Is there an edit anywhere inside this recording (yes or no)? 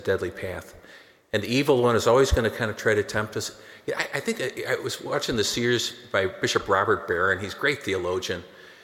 no